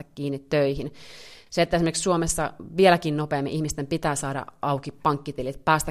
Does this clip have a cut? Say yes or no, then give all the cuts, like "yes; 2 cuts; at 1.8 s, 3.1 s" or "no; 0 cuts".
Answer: no; 0 cuts